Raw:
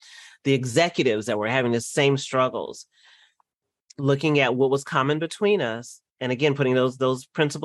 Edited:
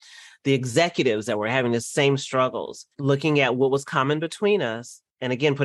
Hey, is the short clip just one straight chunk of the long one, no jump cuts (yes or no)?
no